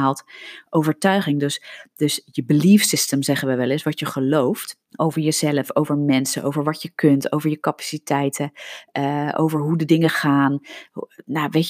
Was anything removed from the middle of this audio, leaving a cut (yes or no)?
yes